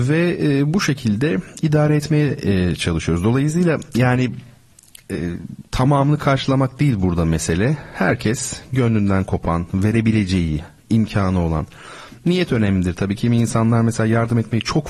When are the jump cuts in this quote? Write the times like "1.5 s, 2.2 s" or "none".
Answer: none